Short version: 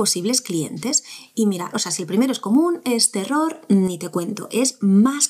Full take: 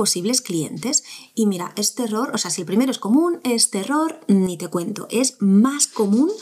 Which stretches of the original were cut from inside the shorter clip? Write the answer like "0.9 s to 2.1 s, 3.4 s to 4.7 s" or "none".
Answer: 1.7 s to 2.3 s